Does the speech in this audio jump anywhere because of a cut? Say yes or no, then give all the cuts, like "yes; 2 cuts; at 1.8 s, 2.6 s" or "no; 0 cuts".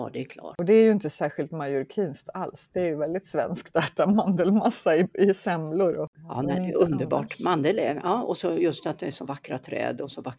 no; 0 cuts